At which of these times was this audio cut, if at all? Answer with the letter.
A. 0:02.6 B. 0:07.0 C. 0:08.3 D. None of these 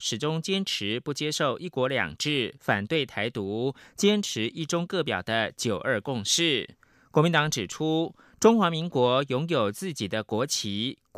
D